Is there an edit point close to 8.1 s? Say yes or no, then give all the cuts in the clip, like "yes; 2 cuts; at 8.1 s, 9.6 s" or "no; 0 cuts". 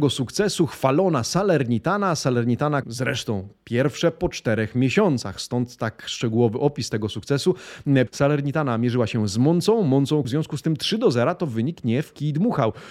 yes; 3 cuts; at 2.8 s, 8.1 s, 10.2 s